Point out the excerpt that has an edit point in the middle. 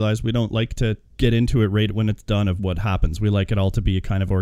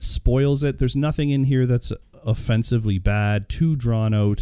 first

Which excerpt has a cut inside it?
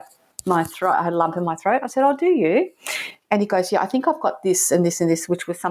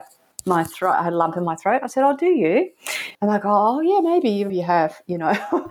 second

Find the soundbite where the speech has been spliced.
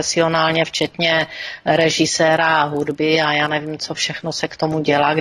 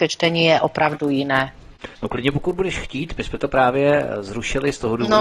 second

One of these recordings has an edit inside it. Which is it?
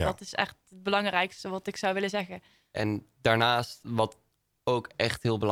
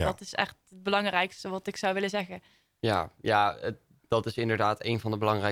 first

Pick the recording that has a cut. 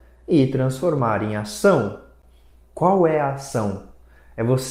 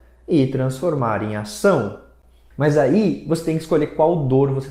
second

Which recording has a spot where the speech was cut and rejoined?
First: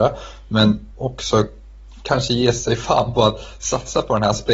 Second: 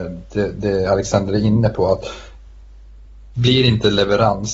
first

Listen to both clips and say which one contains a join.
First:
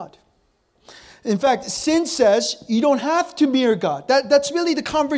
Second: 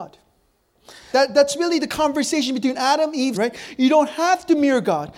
second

